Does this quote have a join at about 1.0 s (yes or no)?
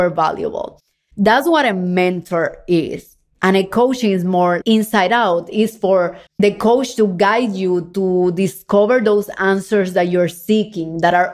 no